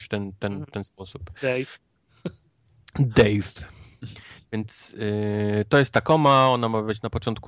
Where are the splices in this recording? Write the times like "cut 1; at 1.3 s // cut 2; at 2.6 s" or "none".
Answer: none